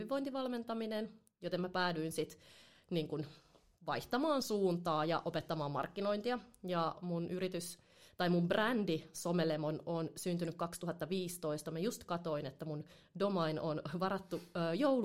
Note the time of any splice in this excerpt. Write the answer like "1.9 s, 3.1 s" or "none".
none